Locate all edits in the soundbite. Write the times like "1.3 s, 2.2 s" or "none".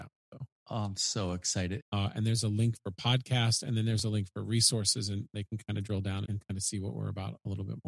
1.8 s, 6.3 s